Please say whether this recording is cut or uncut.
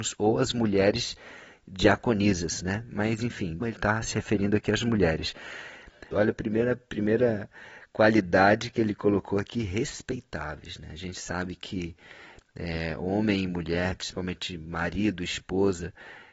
cut